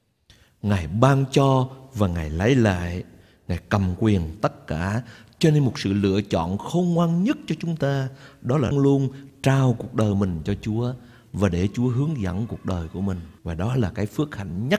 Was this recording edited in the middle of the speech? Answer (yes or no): yes